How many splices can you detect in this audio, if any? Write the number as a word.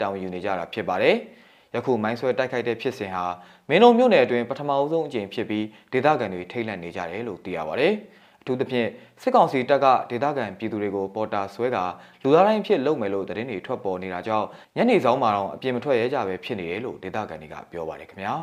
zero